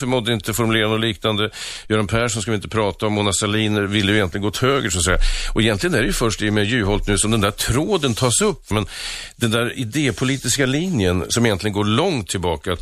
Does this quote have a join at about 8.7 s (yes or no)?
yes